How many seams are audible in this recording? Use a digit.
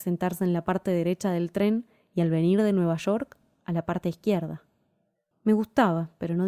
1